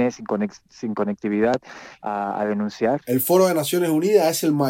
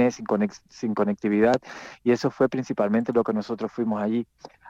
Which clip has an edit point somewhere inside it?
first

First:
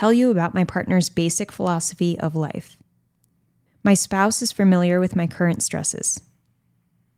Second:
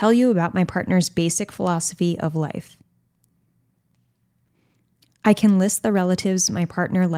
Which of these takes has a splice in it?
first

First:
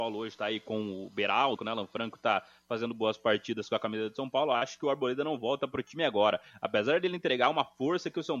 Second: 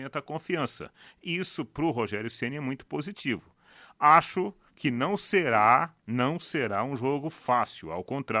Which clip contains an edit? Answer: first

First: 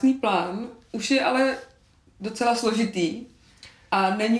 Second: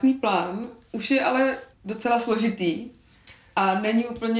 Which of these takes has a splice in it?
second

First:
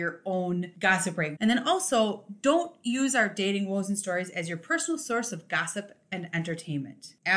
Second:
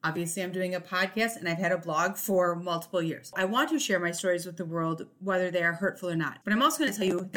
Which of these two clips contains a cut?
first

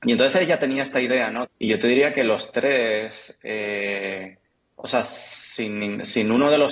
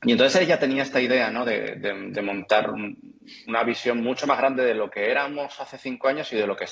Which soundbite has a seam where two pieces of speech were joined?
first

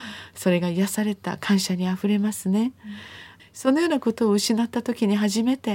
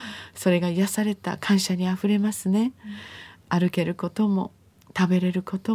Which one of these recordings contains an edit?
first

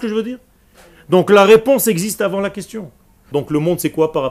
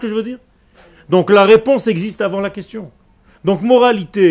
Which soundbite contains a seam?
first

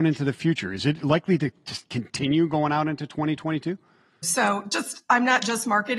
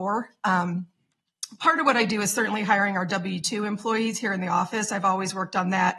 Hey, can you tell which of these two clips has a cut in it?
first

